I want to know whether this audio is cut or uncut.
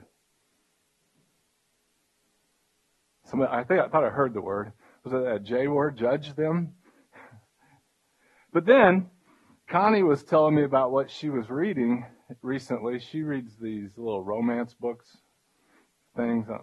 uncut